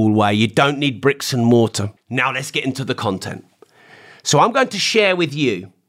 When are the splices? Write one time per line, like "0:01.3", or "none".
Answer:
0:02.0